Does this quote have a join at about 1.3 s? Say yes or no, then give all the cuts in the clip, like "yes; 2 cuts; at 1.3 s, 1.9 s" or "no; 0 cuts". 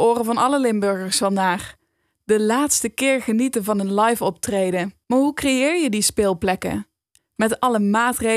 no; 2 cuts; at 5.0 s, 7.2 s